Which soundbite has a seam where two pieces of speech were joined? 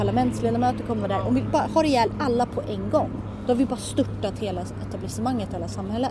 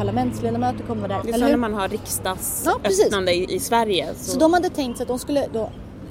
second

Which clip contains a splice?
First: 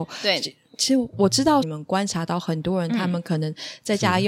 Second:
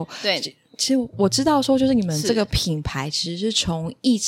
first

